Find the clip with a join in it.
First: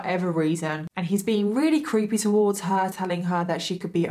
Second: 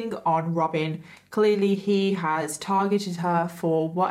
first; 1 cut; at 2.9 s

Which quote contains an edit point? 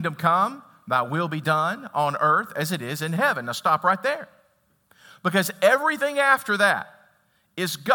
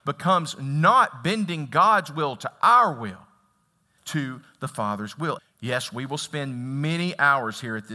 second; 2 cuts; at 4.0 s, 5.4 s

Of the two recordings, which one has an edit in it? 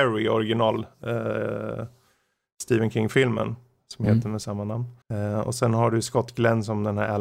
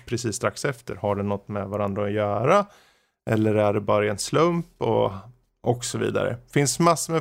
first; 1 cut; at 5.0 s

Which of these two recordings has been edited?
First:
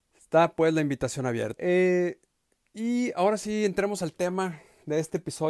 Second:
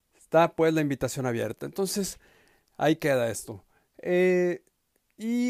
first; 1 cut; at 1.6 s

